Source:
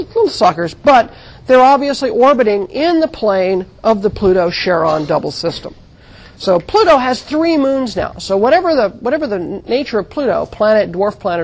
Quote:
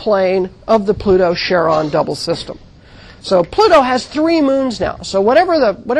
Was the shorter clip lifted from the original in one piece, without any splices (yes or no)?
yes